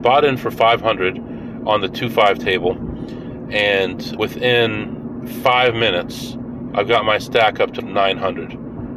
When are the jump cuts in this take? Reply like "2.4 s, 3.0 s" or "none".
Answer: 4.2 s, 7.8 s

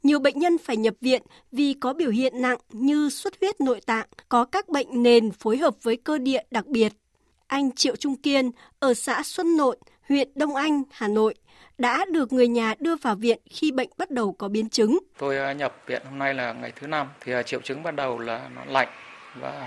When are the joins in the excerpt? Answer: 4.2 s, 15.1 s, 17.2 s

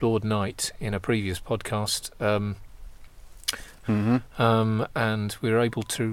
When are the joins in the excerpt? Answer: 3.8 s

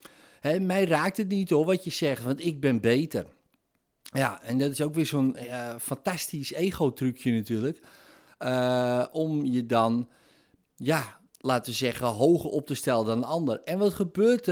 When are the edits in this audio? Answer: 11.3 s

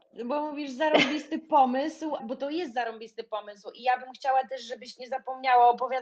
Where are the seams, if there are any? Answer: 2.2 s

